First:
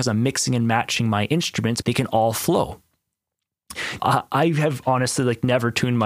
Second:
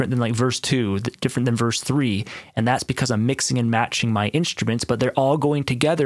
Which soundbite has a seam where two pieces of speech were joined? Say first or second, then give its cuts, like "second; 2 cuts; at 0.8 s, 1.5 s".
first; 2 cuts; at 1.8 s, 4.0 s